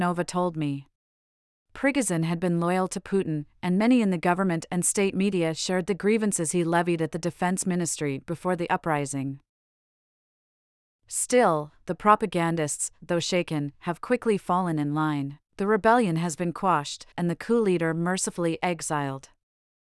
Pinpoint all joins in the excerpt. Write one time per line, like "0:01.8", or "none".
0:15.5
0:17.1